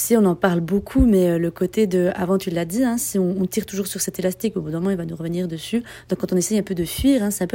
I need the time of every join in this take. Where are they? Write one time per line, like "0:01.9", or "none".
none